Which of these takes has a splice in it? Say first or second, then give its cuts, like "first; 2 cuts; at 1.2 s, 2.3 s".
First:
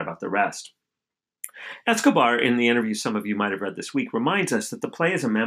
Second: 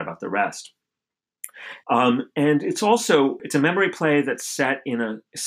second; 2 cuts; at 1.8 s, 3.4 s